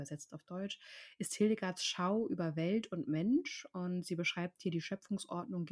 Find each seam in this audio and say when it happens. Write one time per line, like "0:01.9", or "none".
none